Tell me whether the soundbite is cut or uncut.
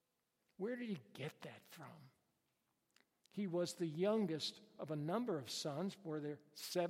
cut